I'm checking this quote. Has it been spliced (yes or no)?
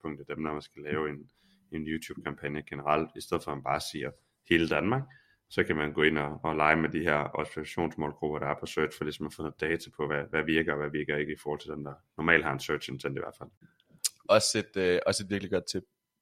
no